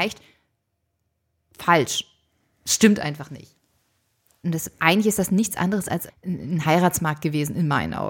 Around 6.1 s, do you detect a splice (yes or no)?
yes